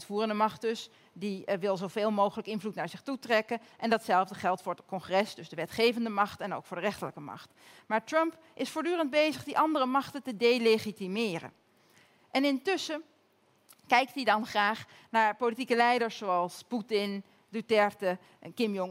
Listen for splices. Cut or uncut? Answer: uncut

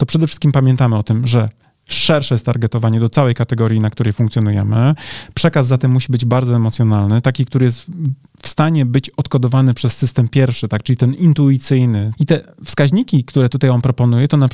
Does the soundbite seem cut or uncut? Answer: cut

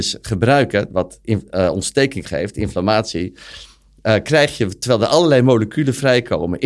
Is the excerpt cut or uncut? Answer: uncut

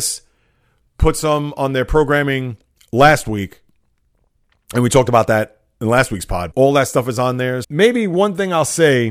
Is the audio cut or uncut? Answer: cut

